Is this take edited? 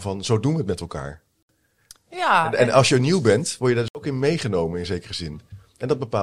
no; 0 cuts

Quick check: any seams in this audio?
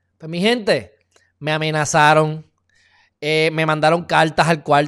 no; 0 cuts

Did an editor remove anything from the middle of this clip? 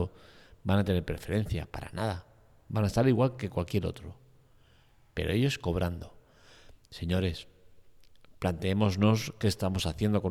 no; 0 cuts

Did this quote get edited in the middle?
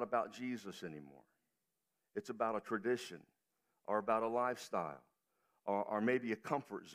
no; 0 cuts

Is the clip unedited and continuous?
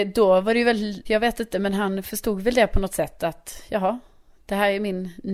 no; 1 cut; at 1.1 s

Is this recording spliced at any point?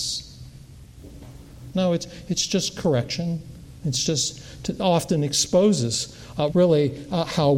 yes; 2 cuts; at 1.7 s, 6.5 s

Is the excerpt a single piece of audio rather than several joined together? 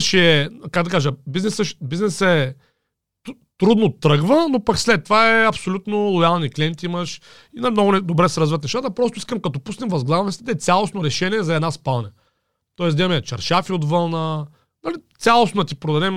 yes; 0 cuts

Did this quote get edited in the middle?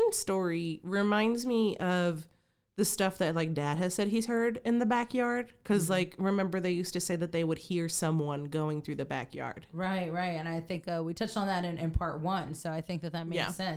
no; 0 cuts

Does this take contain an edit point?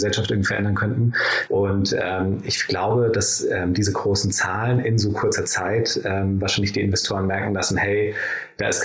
yes; 1 cut; at 1.5 s

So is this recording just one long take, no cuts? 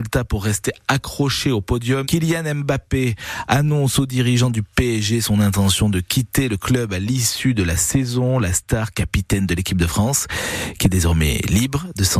no; 1 cut; at 2.0 s

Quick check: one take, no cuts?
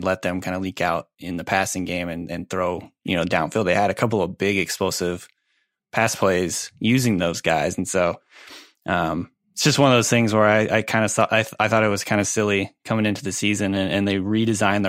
yes; 0 cuts

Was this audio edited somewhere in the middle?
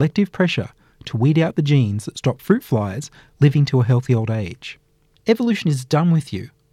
yes; 1 cut; at 5.1 s

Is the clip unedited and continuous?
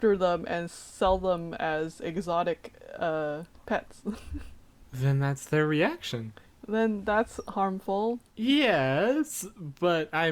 no; 1 cut; at 8.3 s

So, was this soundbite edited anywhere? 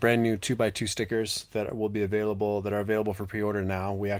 no; 0 cuts

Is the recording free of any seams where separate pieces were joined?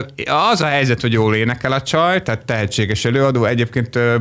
yes; 0 cuts

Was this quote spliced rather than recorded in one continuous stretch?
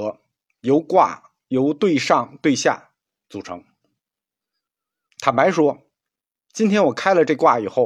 no; 0 cuts

